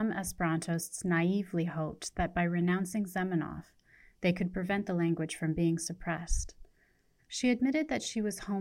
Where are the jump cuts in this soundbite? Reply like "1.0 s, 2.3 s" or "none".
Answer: 7.2 s